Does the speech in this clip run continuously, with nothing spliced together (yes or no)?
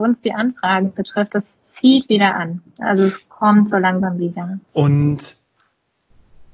no